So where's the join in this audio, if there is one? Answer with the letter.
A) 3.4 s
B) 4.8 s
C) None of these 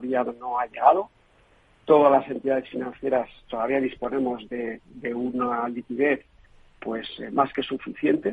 A